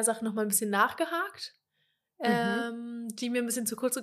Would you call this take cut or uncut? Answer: uncut